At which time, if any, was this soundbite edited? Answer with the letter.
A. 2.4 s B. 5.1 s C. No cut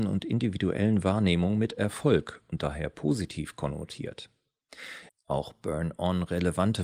B